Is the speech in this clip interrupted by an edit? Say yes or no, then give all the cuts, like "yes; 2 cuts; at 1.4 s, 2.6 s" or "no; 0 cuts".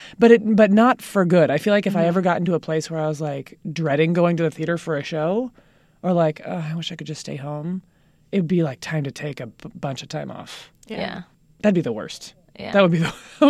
no; 0 cuts